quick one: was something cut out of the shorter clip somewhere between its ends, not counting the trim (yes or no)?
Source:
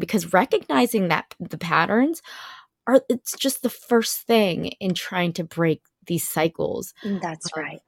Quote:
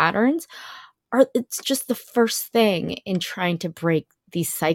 no